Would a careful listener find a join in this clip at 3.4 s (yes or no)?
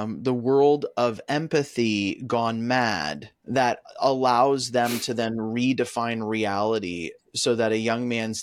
yes